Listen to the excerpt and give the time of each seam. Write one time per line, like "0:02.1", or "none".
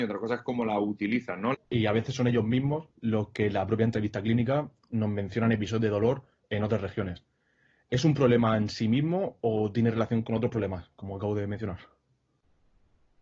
0:01.5
0:02.9